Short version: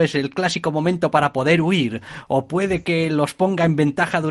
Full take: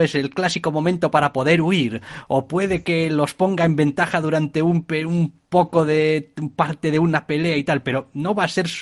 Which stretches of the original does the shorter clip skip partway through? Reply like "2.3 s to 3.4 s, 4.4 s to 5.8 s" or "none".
none